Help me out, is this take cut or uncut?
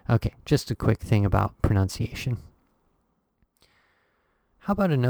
uncut